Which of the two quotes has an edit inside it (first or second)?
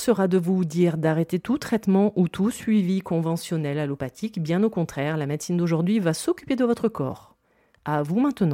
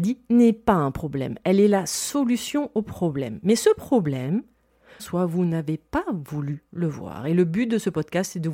second